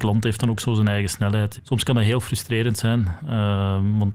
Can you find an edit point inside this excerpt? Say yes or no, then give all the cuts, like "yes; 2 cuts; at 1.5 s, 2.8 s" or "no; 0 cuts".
yes; 1 cut; at 1.6 s